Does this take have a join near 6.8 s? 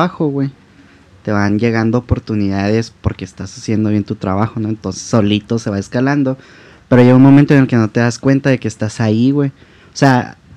no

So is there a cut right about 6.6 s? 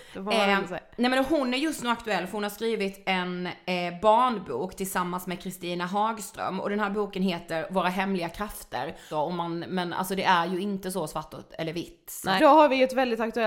no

